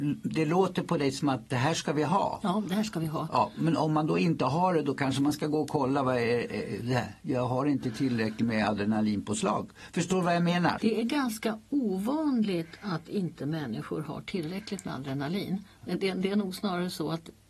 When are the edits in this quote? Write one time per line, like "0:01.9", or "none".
0:10.8

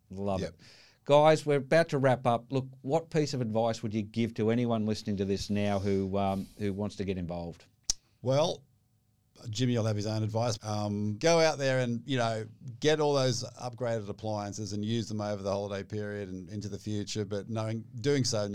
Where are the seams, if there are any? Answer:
0:02.5
0:10.6

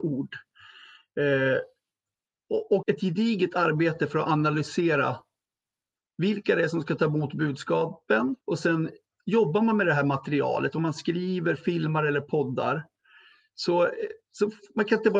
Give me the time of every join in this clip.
0:02.8
0:08.4

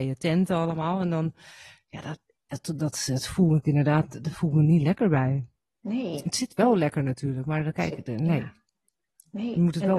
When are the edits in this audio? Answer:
none

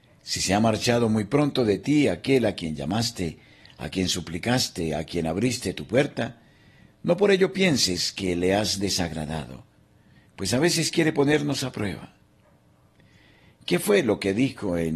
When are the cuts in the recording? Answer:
none

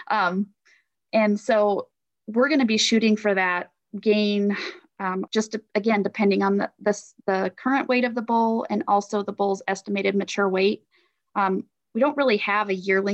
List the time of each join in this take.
0:05.3

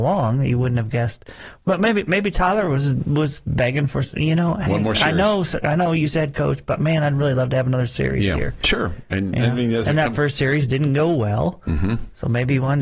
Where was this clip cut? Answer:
none

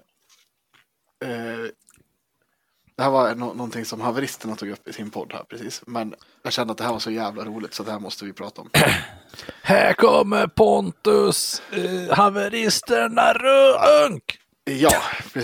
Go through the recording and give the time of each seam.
none

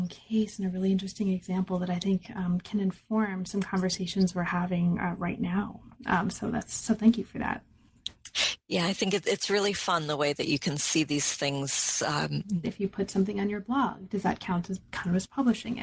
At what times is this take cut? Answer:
0:12.6

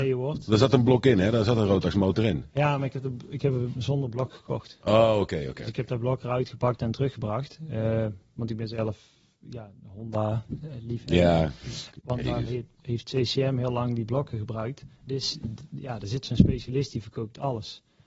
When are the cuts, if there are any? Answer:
0:12.0
0:15.0

